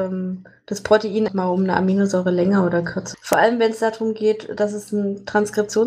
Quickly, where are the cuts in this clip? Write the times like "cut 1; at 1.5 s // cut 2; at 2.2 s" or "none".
cut 1; at 1.3 s // cut 2; at 3.1 s